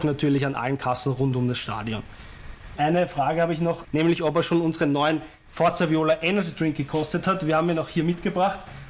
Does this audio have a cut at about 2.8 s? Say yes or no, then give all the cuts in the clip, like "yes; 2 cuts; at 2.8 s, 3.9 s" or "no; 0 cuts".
yes; 2 cuts; at 2.8 s, 3.8 s